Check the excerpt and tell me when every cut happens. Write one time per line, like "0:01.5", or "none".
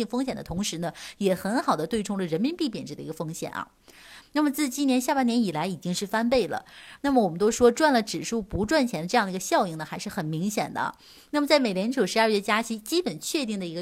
0:04.2
0:07.0